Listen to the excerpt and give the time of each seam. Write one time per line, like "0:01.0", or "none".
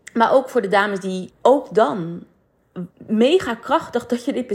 0:01.3
0:02.9